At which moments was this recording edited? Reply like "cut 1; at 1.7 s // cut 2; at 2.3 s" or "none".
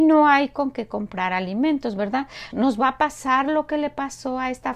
cut 1; at 2.5 s